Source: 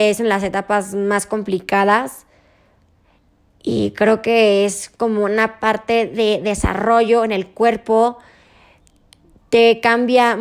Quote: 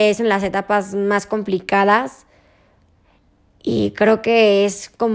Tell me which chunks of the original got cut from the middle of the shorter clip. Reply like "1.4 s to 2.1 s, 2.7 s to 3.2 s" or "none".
none

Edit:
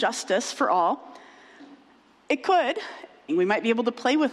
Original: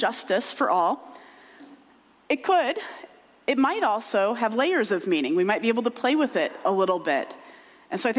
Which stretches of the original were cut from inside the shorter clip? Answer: 3.3 s to 5.3 s

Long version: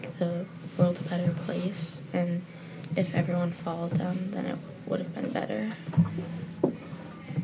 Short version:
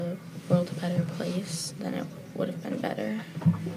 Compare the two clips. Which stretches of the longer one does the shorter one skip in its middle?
2.1 s to 4.3 s

